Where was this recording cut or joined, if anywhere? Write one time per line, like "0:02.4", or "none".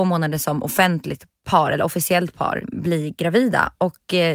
0:02.6